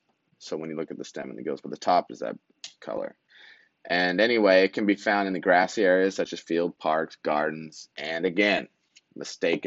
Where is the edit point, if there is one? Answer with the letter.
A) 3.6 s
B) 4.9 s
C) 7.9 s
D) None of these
D